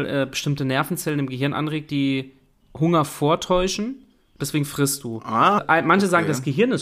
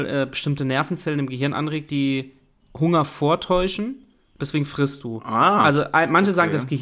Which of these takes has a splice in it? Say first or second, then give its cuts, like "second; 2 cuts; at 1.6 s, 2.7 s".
first; 1 cut; at 5.6 s